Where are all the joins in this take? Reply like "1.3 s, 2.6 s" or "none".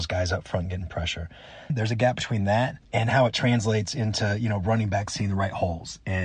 1.7 s, 2.8 s